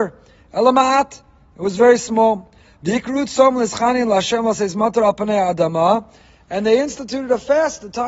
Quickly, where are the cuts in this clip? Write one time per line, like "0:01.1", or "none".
none